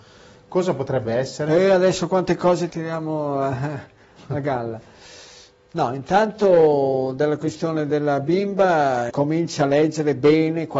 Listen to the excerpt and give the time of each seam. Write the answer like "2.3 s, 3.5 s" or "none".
2.7 s, 9.1 s